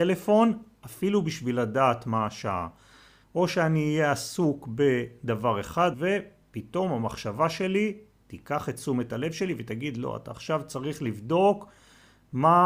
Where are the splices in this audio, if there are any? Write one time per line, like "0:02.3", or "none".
0:03.2
0:05.9